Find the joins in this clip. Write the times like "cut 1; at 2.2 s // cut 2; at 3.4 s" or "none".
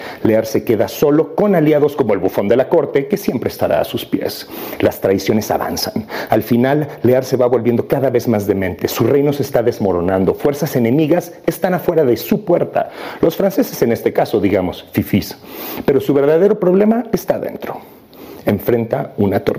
none